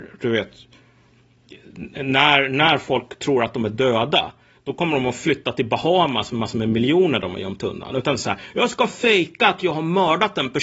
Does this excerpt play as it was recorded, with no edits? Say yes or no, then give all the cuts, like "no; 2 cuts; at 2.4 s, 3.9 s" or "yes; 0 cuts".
yes; 0 cuts